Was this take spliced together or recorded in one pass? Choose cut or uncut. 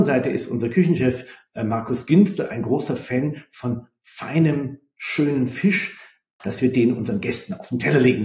cut